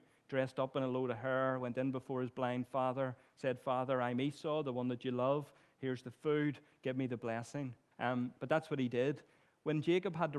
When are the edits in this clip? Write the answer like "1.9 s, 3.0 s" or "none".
7.9 s